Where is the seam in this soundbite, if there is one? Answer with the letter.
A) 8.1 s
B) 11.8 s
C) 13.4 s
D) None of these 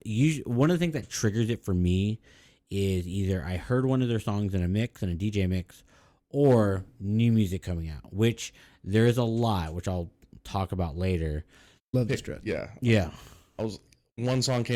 B